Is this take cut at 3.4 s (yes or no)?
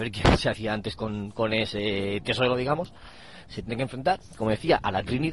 yes